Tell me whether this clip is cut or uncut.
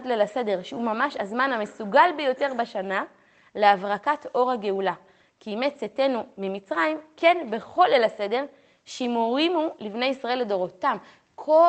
uncut